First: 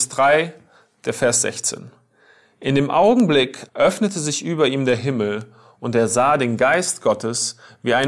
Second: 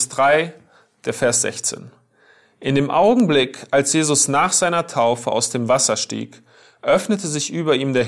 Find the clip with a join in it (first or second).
first